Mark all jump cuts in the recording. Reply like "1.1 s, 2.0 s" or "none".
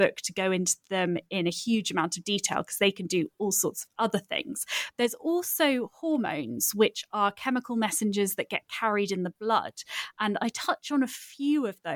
4.9 s

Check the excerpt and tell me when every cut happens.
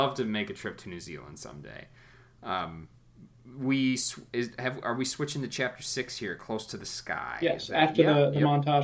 none

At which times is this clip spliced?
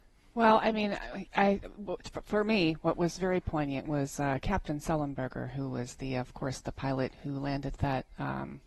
none

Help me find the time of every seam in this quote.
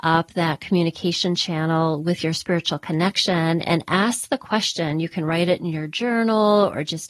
none

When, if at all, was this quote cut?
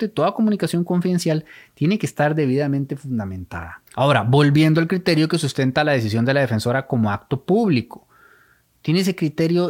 3.9 s

